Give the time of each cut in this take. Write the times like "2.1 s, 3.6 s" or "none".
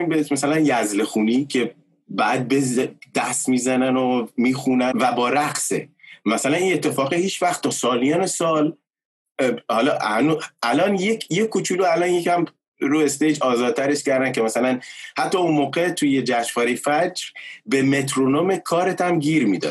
4.9 s